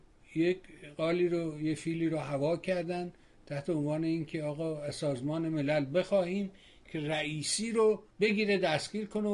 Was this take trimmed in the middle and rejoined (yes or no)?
yes